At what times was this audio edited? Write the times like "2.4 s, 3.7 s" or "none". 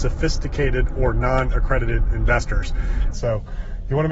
3.1 s